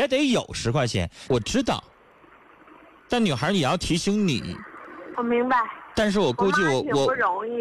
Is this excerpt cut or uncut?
cut